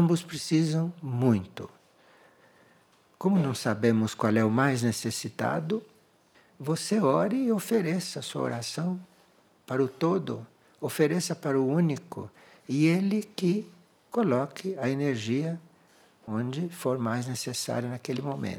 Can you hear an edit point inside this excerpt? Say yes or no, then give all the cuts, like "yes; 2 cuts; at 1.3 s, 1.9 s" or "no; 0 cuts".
no; 0 cuts